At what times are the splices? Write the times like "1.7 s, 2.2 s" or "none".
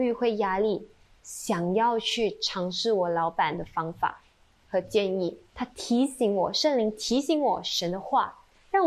5.5 s